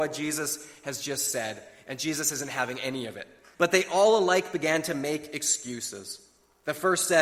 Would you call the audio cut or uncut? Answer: cut